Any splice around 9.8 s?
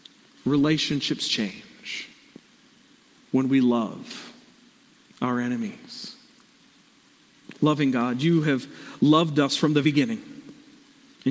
yes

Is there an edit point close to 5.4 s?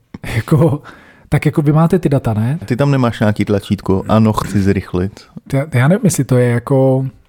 yes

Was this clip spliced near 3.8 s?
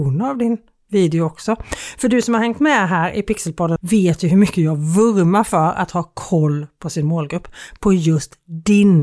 yes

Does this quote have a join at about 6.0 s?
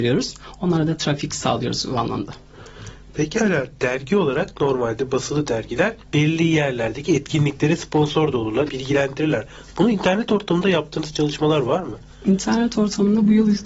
yes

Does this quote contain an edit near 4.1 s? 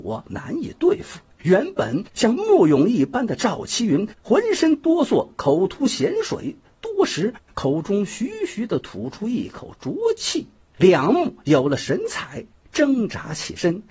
no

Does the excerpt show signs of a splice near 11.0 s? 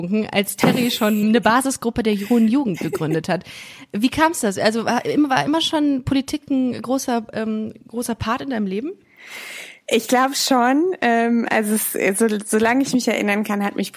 no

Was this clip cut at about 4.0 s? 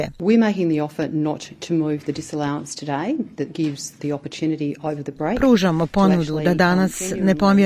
yes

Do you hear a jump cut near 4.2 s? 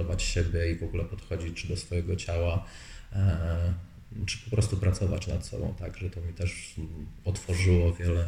no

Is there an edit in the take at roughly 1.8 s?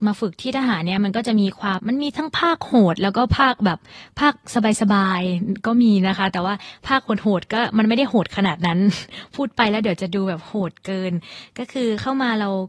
yes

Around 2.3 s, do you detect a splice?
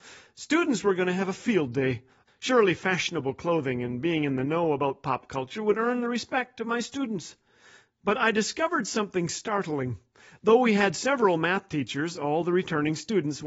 yes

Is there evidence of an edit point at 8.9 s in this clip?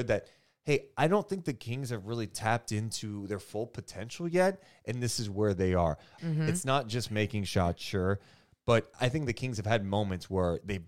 yes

